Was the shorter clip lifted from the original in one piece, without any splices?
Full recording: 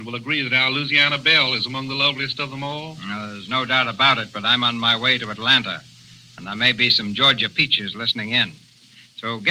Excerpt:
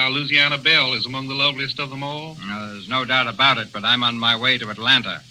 yes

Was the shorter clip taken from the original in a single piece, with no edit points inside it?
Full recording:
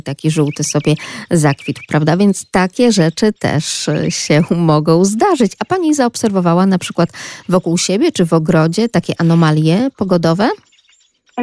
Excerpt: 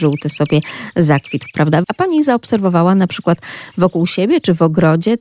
no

